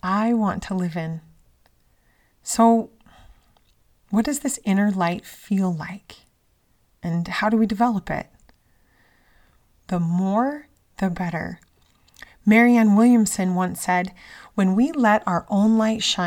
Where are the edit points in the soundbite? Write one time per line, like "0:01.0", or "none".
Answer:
0:09.8

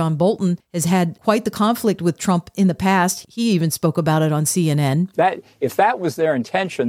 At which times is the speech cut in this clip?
0:05.1

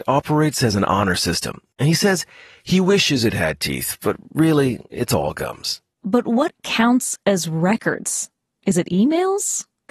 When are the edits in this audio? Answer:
0:05.9

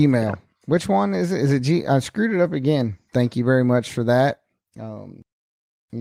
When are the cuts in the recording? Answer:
0:03.1

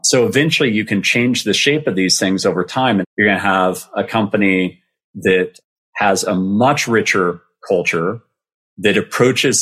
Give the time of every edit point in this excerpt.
0:03.0

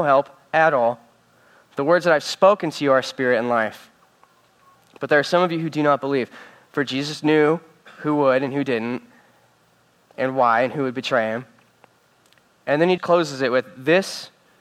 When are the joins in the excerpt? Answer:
0:13.0

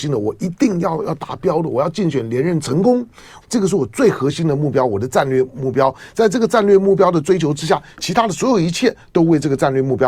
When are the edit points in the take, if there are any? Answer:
0:03.4

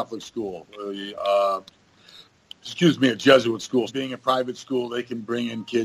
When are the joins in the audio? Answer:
0:03.9

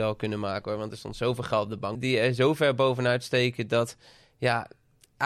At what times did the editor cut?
0:02.0

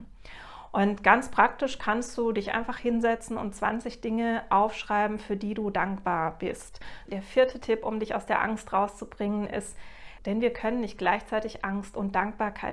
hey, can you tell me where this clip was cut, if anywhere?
0:07.1
0:10.2

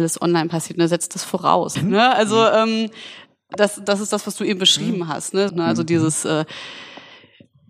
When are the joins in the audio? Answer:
0:01.7
0:05.5

